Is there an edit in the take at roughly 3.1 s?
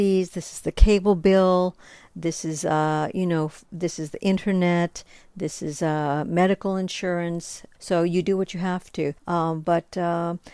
no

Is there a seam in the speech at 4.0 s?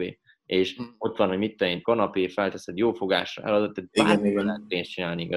no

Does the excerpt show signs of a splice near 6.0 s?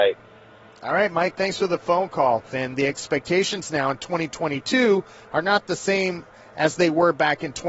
no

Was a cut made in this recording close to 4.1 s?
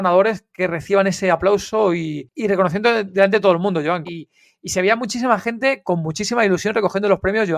yes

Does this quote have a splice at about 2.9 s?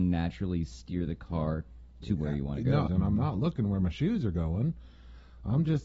yes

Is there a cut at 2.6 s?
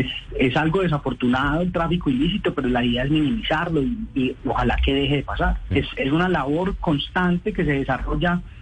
no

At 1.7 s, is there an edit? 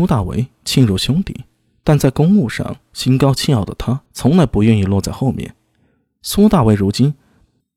no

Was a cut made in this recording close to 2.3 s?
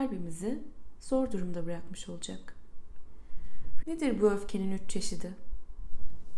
no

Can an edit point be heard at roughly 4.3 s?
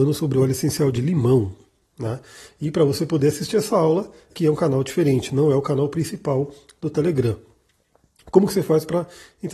yes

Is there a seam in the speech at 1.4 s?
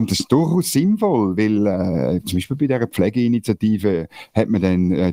no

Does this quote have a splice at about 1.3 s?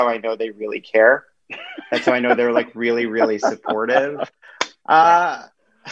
no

